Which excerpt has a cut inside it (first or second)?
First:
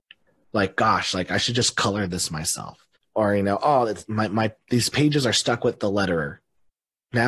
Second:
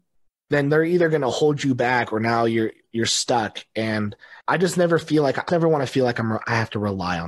second